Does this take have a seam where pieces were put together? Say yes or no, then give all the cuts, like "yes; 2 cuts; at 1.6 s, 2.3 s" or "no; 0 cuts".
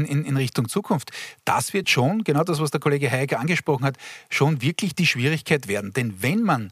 no; 0 cuts